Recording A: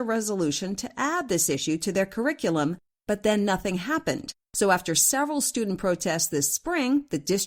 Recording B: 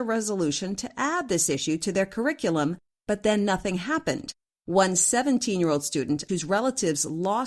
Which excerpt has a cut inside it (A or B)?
B